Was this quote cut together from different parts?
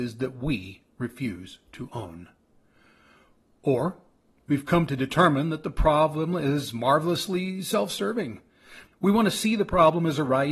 yes; 1 cut; at 8.9 s

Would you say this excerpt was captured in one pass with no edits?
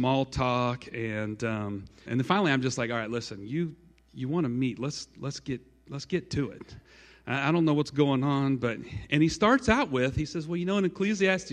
no; 1 cut; at 2.1 s

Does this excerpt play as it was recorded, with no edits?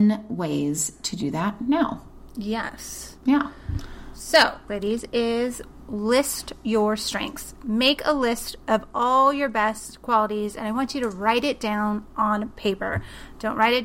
no; 1 cut; at 4.7 s

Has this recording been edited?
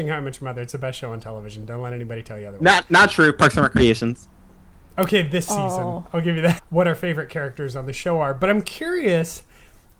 yes; 1 cut; at 6.6 s

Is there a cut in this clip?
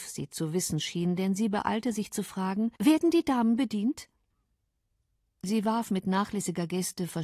yes; 2 cuts; at 2.8 s, 5.2 s

